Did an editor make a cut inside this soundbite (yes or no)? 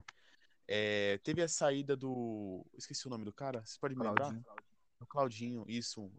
no